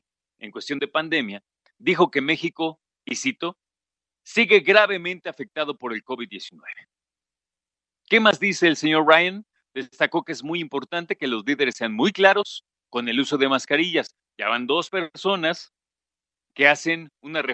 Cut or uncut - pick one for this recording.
uncut